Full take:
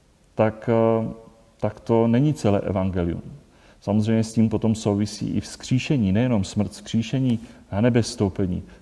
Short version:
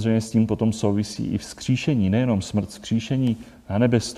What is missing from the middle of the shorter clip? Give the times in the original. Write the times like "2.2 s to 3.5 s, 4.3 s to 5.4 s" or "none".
none